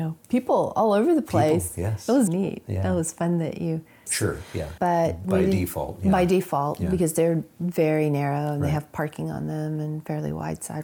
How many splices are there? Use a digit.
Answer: 2